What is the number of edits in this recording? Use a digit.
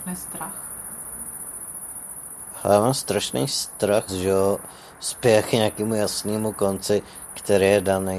1